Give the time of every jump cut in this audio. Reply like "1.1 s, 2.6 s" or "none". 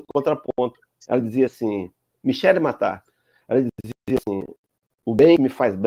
none